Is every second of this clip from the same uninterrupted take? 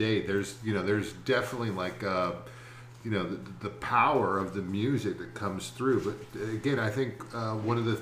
yes; 0 cuts

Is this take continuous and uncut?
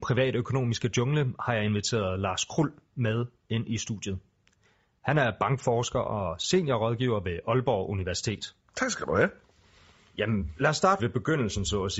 no; 2 cuts; at 8.7 s, 11.0 s

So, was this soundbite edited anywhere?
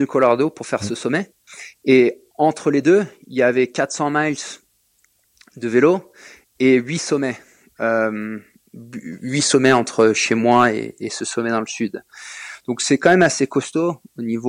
no; 0 cuts

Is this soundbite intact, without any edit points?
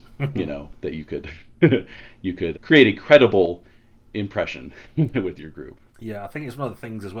no; 1 cut; at 2.5 s

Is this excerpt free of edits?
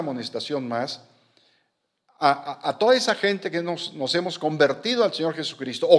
yes; 0 cuts

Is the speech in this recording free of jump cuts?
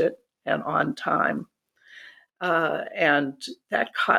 no; 1 cut; at 2.3 s

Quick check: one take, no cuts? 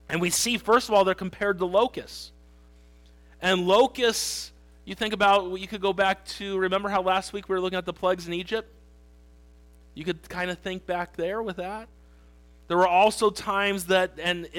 yes; 0 cuts

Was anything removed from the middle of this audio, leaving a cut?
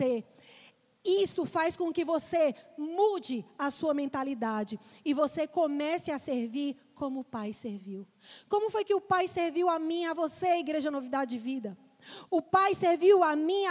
yes; 1 cut; at 12.3 s

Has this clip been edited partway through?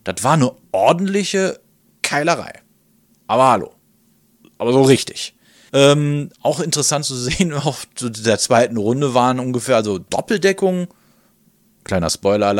yes; 1 cut; at 5.7 s

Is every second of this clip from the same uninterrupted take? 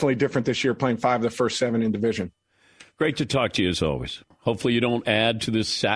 no; 1 cut; at 4.3 s

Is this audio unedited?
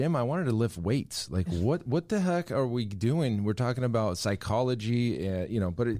yes; 0 cuts

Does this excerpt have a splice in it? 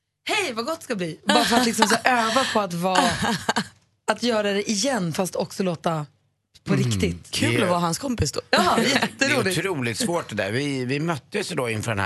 no; 0 cuts

